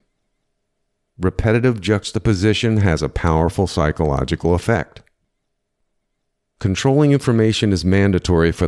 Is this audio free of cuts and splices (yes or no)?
yes